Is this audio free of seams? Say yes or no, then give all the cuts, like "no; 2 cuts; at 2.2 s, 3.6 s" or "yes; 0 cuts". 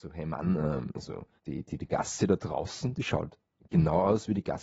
no; 1 cut; at 1.4 s